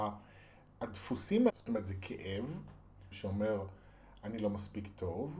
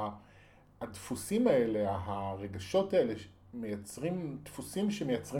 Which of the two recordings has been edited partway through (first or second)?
first